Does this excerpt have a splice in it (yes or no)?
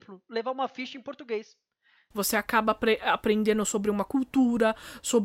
yes